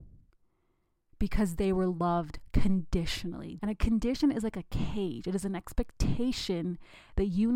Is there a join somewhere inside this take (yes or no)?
yes